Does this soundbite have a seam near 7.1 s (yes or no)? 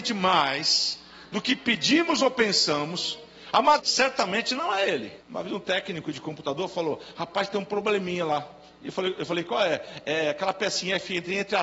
no